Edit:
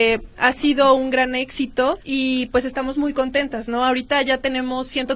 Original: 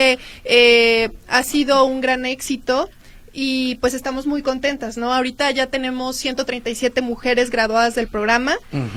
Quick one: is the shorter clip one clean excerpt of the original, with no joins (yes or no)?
no